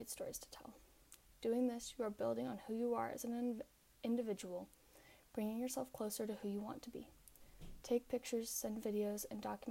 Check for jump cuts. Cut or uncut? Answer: uncut